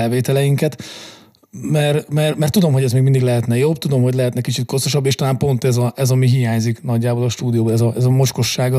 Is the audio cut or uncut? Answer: uncut